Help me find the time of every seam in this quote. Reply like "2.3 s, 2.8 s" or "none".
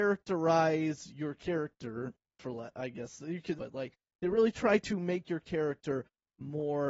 3.6 s